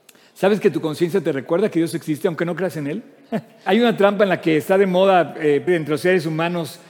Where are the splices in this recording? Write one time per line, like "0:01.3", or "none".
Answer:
0:03.7
0:05.7